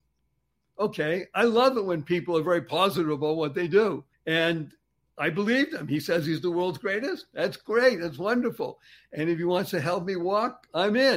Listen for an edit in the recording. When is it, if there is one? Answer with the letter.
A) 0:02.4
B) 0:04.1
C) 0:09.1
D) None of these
B